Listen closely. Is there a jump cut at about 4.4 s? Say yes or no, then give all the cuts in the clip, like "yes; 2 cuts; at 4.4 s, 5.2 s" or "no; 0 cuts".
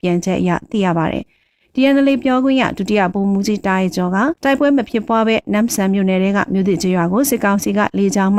yes; 1 cut; at 4.4 s